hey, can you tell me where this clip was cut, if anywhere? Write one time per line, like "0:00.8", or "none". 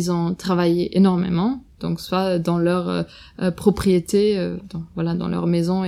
none